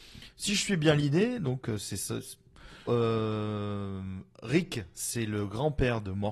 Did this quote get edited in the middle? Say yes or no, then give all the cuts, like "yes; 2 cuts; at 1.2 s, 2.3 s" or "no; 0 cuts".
yes; 1 cut; at 2.9 s